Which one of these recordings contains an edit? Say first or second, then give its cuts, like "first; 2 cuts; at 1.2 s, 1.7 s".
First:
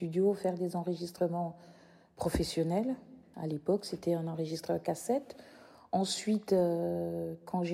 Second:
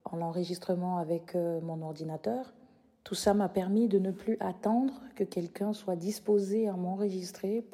first; 1 cut; at 3.3 s